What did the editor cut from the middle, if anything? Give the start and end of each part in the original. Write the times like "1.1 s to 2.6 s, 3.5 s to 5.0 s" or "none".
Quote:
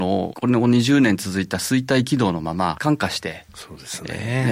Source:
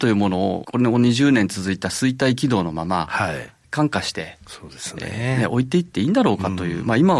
3.1 s to 3.7 s